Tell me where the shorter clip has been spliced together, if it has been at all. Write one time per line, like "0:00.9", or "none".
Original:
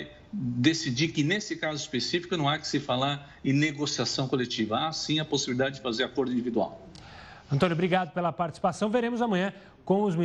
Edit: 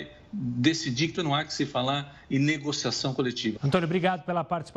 0:01.2
0:03.6